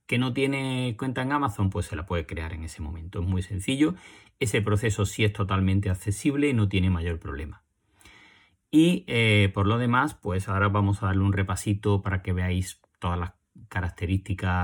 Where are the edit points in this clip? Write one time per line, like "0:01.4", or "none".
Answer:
none